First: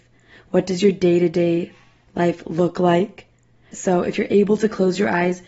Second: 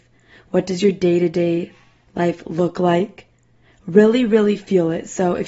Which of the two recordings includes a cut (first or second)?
first